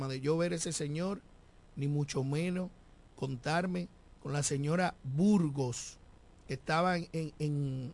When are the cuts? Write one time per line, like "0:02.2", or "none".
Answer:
none